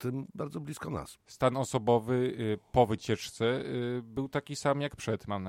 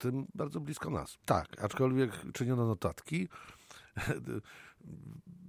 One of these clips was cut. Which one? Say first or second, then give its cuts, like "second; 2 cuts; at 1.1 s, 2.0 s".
second; 1 cut; at 1.2 s